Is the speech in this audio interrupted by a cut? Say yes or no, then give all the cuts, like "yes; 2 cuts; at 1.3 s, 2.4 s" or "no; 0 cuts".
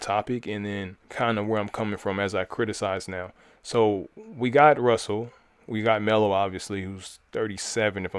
yes; 1 cut; at 1.0 s